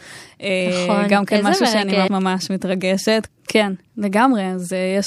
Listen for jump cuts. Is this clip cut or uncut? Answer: cut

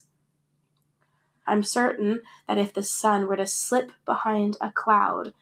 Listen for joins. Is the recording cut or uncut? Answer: cut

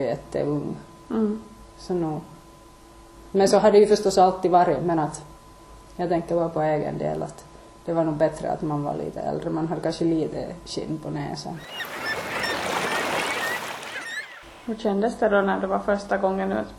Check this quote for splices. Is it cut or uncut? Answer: uncut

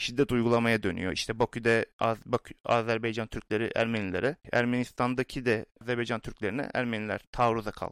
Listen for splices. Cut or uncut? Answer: uncut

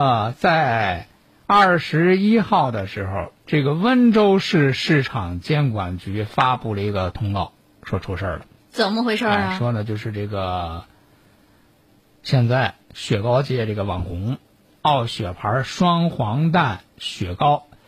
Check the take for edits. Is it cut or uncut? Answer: uncut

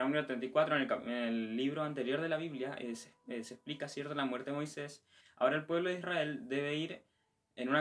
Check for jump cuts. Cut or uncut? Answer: cut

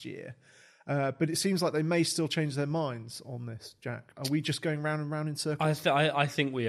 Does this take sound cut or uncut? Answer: uncut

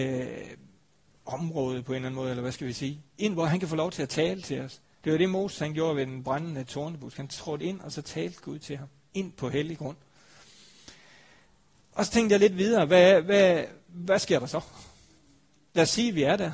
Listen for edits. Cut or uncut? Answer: uncut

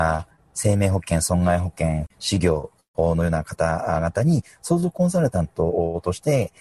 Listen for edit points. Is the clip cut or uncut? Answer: cut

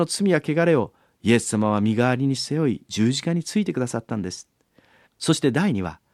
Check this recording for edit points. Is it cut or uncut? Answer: cut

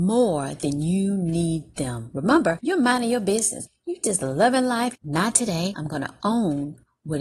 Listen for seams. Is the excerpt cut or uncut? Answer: cut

